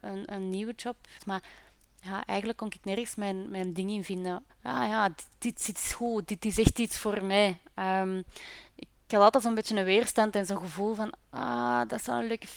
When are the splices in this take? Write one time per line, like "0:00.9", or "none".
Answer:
0:01.2
0:04.5